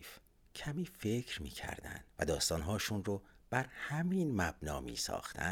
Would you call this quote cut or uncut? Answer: cut